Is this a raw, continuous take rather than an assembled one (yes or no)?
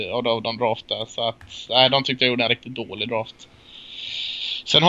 yes